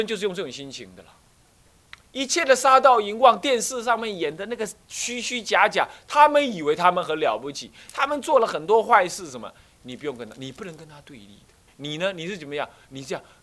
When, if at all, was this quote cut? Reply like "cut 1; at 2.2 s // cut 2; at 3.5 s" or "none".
cut 1; at 11.7 s